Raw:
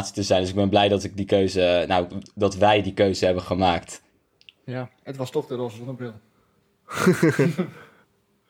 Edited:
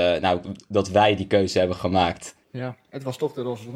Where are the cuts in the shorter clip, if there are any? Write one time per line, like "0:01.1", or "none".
0:02.4